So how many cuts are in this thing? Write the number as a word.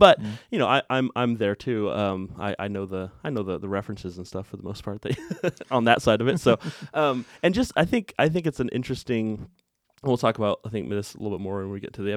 zero